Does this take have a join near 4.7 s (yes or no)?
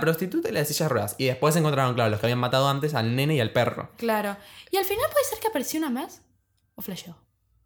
no